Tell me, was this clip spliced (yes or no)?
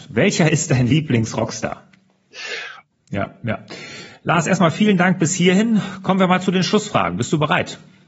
yes